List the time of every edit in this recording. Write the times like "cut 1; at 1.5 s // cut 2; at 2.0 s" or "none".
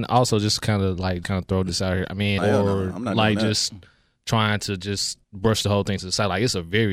cut 1; at 1.2 s // cut 2; at 2.4 s // cut 3; at 5.2 s

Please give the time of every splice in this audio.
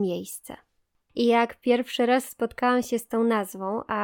cut 1; at 1.0 s

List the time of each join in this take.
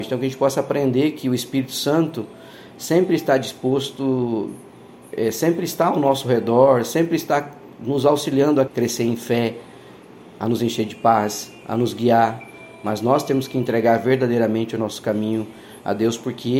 cut 1; at 8.7 s

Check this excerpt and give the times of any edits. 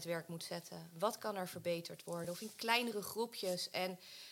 none

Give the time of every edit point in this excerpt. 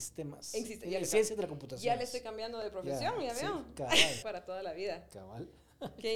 cut 1; at 4.2 s

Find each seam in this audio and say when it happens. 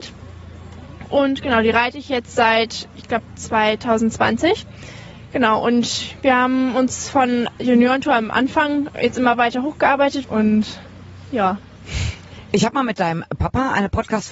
cut 1; at 10.2 s

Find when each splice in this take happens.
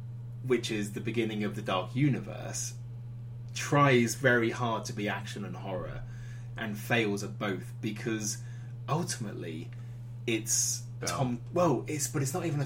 cut 1; at 11.0 s

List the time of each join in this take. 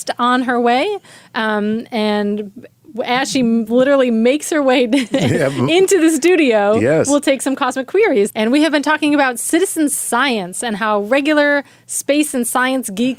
cut 1; at 8.3 s

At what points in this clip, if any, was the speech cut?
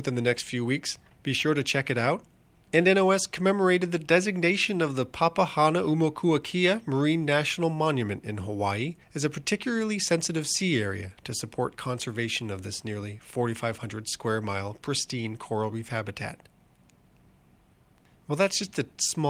cut 1; at 2.6 s // cut 2; at 9.0 s

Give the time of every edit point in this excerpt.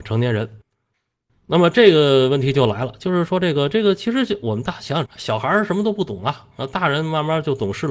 cut 1; at 5.1 s

